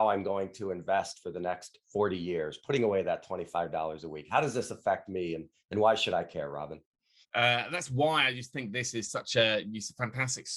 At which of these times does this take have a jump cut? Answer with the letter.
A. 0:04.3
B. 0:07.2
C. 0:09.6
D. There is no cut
B